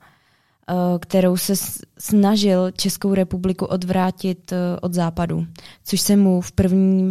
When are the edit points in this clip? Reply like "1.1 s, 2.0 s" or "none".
none